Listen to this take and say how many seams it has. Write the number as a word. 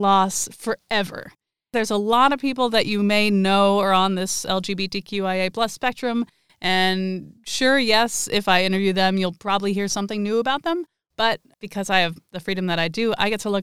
zero